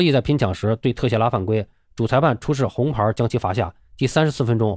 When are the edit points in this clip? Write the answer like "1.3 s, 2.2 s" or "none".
3.8 s